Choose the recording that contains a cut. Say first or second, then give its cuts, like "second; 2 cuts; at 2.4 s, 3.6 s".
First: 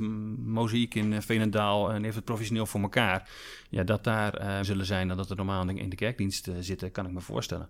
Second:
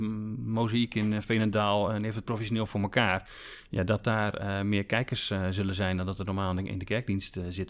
first; 1 cut; at 4.6 s